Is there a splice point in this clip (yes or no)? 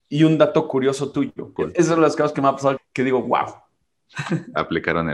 yes